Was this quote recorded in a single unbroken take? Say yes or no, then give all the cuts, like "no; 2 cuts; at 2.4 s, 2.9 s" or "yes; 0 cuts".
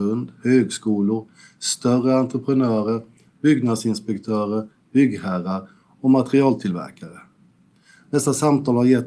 yes; 0 cuts